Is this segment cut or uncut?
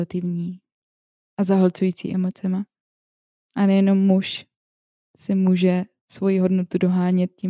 uncut